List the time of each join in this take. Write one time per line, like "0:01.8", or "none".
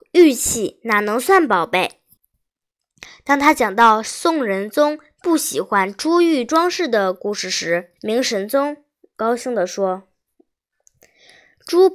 0:02.2
0:08.0

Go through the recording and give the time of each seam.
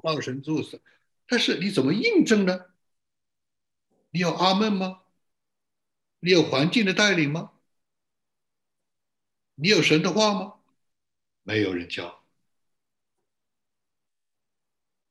0:09.4

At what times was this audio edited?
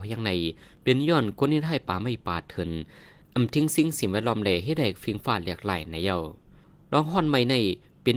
none

